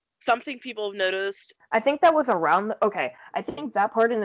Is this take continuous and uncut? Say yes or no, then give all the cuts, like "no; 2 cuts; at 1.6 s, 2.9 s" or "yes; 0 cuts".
no; 1 cut; at 1.6 s